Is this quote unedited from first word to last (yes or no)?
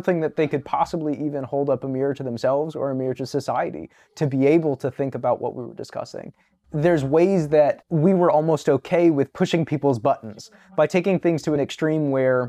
yes